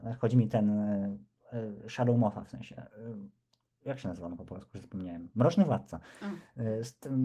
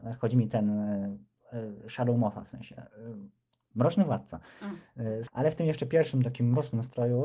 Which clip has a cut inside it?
second; 2 cuts; at 3.7 s, 5.3 s

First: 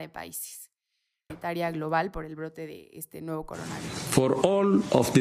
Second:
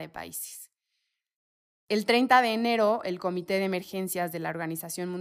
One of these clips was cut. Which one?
first; 1 cut; at 1.3 s

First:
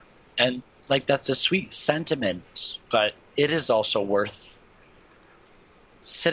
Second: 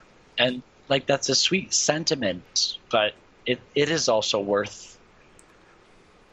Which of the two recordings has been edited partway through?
first; 1 cut; at 3.3 s

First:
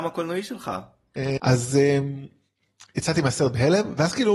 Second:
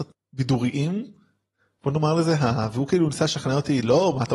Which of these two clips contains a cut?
first; 1 cut; at 1.4 s

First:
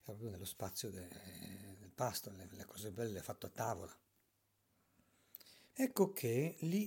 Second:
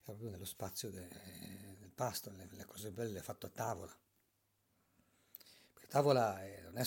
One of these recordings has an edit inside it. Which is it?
first; 1 cut; at 5.7 s

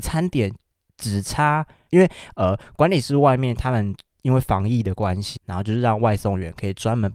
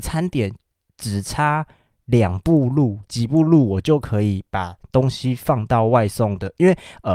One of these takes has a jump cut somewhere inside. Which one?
first; 2 cuts; at 1.9 s, 5.4 s

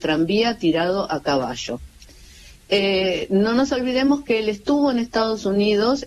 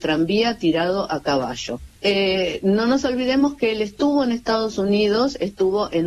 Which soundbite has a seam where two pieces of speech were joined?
second; 1 cut; at 2.0 s

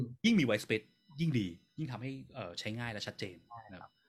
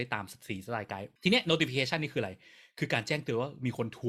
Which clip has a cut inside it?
second; 1 cut; at 1.2 s

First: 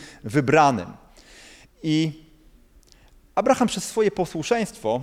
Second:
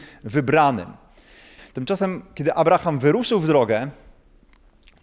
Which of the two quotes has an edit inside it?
second; 1 cut; at 1.6 s

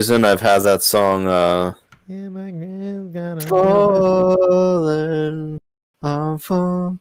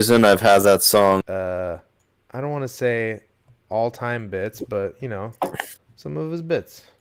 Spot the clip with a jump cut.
second; 1 cut; at 1.2 s

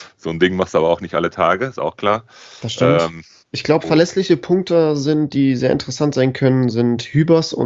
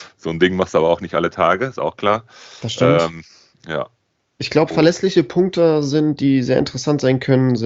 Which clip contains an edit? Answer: first; 1 cut; at 3.4 s

